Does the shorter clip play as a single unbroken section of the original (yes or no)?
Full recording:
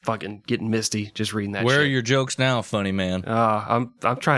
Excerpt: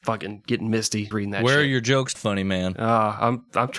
no